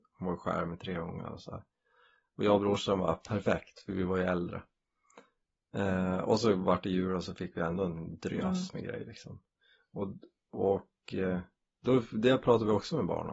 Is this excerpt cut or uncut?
uncut